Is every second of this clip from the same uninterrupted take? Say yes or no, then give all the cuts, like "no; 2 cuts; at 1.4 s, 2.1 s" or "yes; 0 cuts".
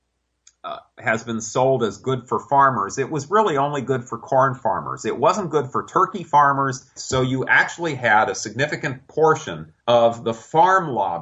no; 2 cuts; at 7.0 s, 9.8 s